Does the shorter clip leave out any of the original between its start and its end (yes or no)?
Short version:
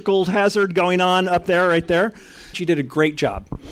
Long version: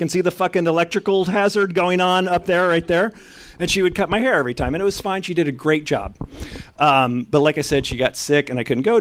yes